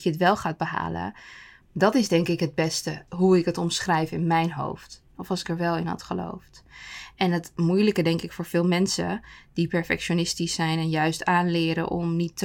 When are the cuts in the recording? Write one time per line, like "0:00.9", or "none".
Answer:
0:01.6
0:05.1